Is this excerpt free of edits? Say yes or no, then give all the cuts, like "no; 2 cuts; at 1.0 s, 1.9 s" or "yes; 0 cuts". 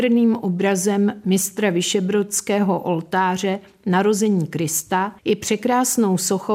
no; 1 cut; at 5.2 s